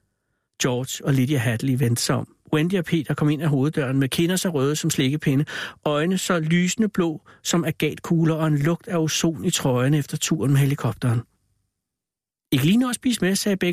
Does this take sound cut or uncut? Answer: uncut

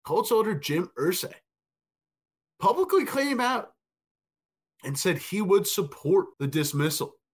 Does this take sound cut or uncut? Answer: cut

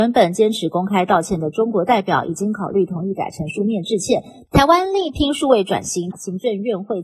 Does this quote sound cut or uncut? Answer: cut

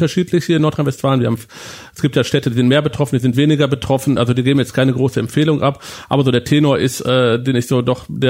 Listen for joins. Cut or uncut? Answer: uncut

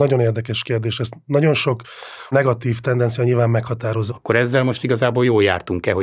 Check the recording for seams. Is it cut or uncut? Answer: cut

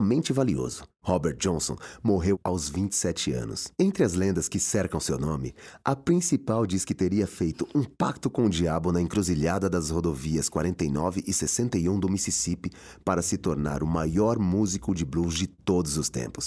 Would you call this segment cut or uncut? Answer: cut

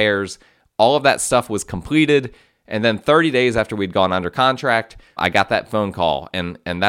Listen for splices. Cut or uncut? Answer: cut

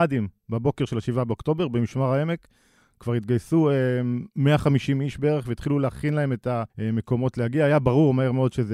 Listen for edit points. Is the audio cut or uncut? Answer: cut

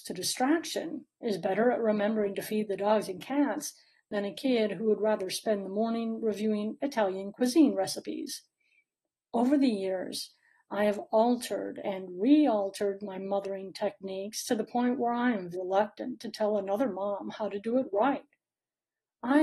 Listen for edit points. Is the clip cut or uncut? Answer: cut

